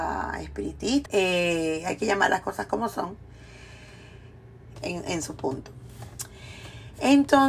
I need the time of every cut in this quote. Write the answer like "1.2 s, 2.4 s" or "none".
1.1 s, 4.8 s